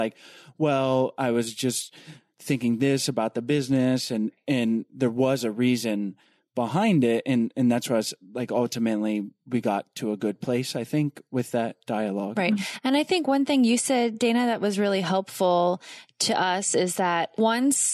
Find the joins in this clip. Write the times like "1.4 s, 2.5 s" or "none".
none